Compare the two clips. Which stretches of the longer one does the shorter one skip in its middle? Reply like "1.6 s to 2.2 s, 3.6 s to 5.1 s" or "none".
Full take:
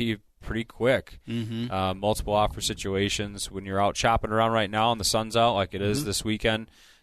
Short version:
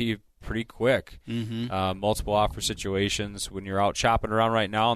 none

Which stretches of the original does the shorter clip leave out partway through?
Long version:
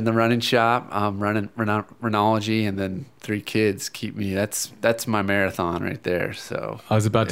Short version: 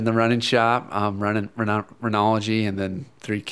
none

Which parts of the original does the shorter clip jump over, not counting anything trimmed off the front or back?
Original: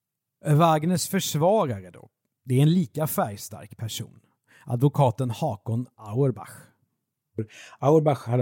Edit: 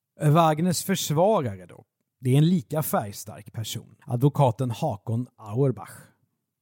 4.3 s to 4.6 s

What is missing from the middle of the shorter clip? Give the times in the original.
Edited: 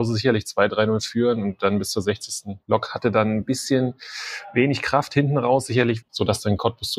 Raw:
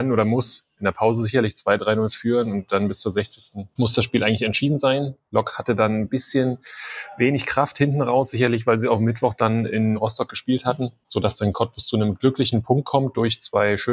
3.7 s to 5.2 s, 8.6 s to 11.0 s

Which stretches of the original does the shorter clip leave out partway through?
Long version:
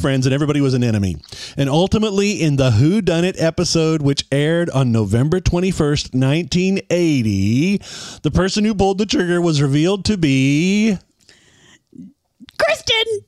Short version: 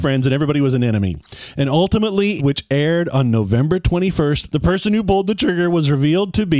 2.4 s to 4.0 s, 6.1 s to 8.2 s

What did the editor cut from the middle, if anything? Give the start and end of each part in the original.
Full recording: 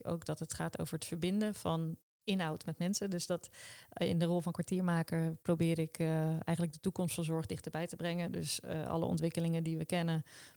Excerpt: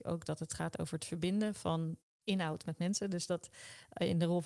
none

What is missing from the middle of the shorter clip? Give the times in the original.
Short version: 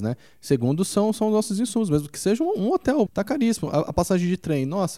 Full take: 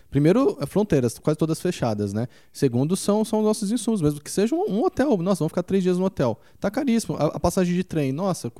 5.2 s to 6.5 s

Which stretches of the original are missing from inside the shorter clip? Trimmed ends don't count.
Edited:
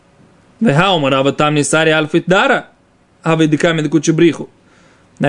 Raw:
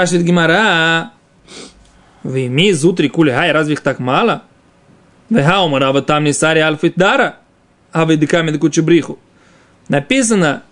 none

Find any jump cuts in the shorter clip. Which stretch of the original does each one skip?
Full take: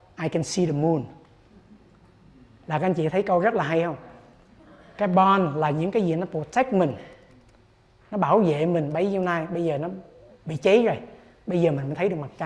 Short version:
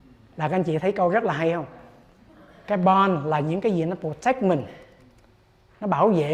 none

